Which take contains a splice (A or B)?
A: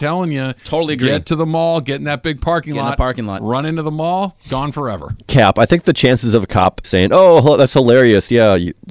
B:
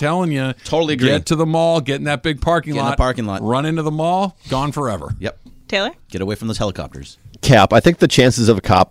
A